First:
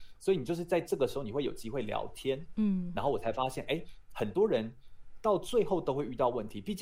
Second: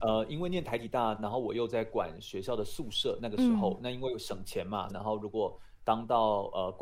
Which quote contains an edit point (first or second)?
second